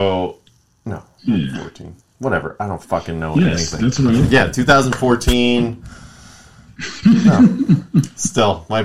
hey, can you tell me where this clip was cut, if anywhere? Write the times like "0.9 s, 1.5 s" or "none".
none